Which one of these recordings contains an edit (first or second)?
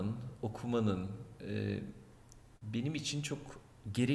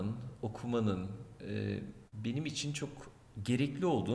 second